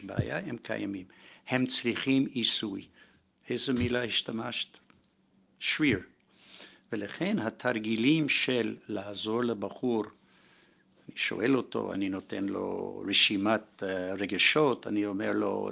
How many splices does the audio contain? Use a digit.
1